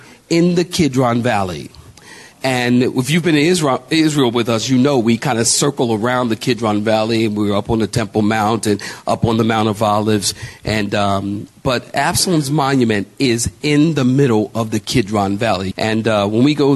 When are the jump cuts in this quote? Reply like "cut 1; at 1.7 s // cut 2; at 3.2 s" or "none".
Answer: cut 1; at 15.7 s